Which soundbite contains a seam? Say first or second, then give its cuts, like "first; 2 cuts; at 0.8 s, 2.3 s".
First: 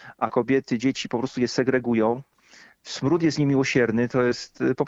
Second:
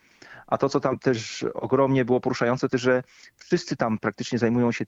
second; 1 cut; at 2.7 s